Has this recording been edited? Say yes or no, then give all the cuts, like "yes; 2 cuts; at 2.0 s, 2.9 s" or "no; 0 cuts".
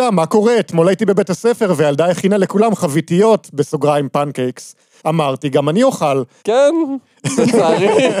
yes; 2 cuts; at 5.0 s, 6.4 s